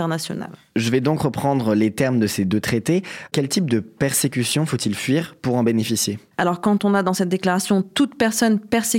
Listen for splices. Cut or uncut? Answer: uncut